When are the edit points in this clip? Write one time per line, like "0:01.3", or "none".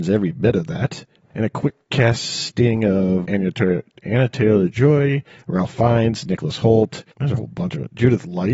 0:03.2